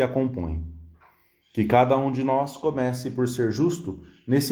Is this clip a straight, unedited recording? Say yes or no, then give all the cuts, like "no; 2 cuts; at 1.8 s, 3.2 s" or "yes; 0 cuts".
yes; 0 cuts